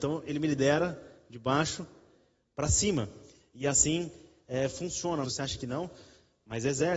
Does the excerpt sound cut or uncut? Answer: cut